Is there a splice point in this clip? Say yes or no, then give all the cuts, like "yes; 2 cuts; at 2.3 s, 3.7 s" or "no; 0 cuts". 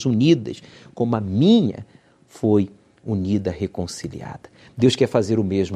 no; 0 cuts